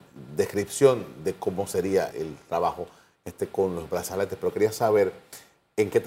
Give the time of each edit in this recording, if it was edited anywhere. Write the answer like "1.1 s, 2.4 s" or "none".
2.1 s